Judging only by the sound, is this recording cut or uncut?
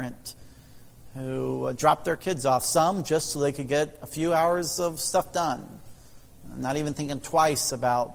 uncut